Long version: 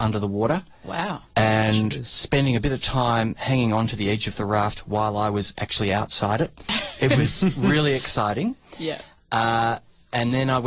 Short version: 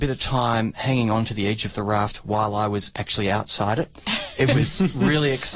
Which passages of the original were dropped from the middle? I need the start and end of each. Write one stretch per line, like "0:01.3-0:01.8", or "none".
none